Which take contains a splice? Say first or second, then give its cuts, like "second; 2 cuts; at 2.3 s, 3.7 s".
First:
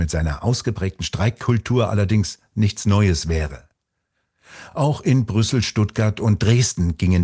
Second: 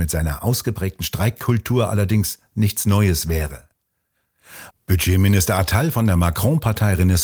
second; 1 cut; at 4.7 s